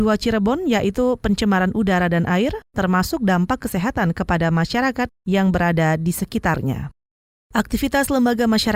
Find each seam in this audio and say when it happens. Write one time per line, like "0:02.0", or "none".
0:07.4